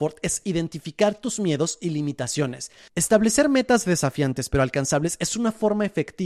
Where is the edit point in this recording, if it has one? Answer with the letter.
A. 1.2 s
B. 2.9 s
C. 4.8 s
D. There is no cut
B